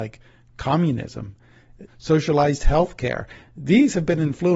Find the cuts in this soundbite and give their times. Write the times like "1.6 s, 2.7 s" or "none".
1.9 s